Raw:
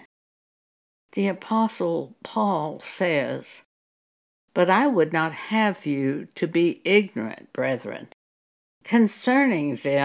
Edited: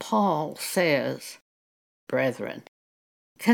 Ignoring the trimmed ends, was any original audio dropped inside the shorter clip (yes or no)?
yes